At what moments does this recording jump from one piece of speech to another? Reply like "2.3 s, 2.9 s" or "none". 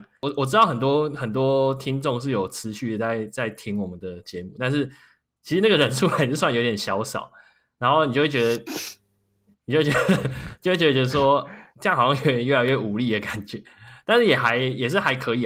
none

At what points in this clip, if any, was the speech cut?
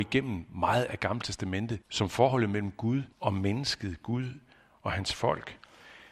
1.8 s, 3.1 s

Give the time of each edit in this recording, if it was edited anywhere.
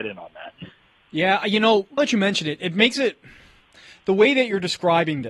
2.0 s

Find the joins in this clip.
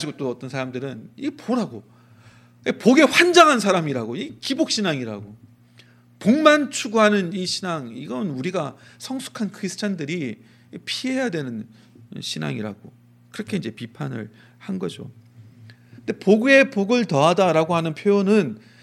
none

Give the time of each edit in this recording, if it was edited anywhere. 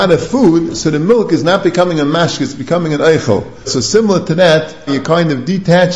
3.7 s, 4.9 s

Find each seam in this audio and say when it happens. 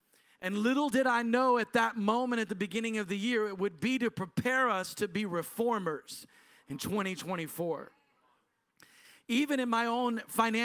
none

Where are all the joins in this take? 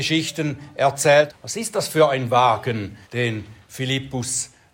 1.3 s, 3.0 s

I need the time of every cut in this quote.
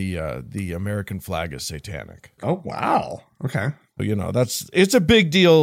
2.4 s, 4.0 s

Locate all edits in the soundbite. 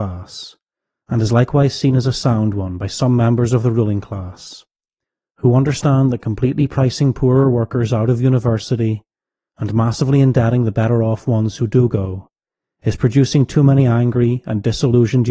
none

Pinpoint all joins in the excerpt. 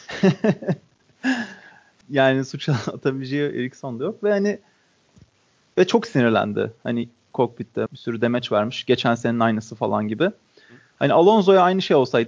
2.0 s, 7.9 s

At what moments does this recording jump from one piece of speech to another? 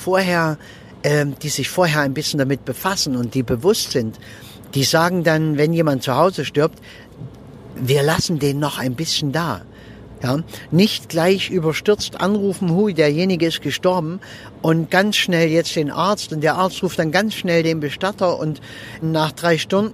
10.2 s, 19.0 s

